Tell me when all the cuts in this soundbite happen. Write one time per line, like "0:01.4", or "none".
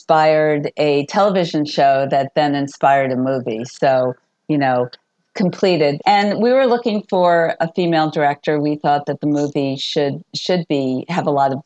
0:06.0